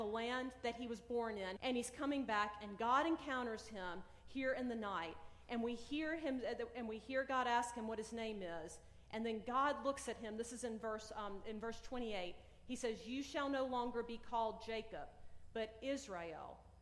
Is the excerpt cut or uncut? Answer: cut